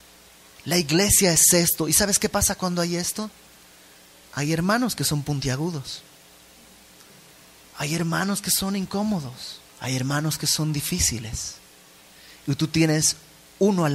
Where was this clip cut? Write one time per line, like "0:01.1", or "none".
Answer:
0:09.7